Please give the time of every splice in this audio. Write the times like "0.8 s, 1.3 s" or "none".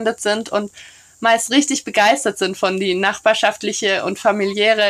none